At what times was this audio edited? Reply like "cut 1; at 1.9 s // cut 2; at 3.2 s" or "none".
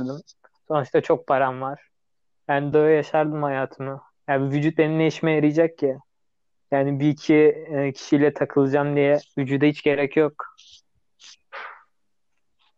cut 1; at 2.7 s

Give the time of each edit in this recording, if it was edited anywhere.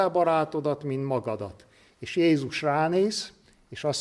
none

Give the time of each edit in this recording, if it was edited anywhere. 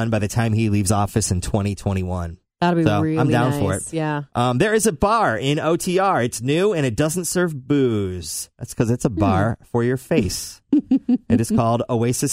none

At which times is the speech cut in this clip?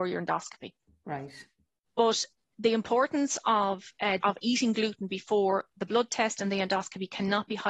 cut 1; at 1.9 s // cut 2; at 4.2 s

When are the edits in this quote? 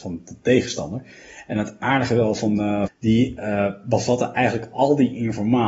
cut 1; at 2.9 s

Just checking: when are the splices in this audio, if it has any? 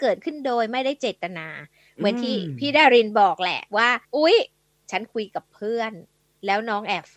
cut 1; at 4.0 s

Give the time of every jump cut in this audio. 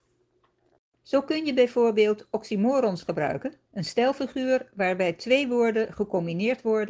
cut 1; at 0.9 s // cut 2; at 3.7 s

